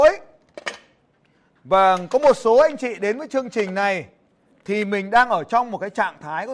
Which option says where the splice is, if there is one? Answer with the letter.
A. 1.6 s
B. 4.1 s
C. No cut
C